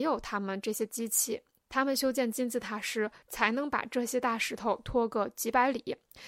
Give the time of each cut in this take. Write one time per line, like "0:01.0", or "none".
0:03.2